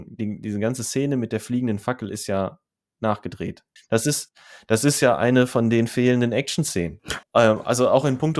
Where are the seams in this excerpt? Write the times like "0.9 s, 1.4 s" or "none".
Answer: 3.8 s, 7.2 s